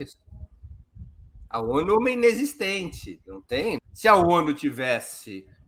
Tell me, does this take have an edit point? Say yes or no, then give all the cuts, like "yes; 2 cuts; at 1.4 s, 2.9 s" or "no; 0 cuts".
yes; 1 cut; at 3.8 s